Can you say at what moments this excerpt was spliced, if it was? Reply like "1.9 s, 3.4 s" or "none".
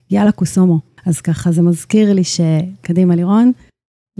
1.0 s